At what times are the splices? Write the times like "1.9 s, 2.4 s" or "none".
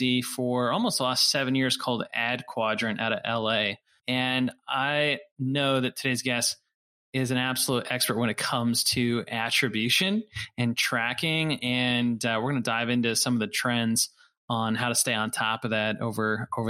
4.0 s